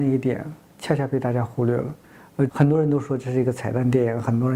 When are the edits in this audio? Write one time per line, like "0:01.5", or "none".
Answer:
0:02.5